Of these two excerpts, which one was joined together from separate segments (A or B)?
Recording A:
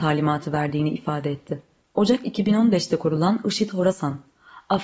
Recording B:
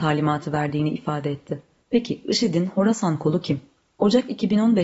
A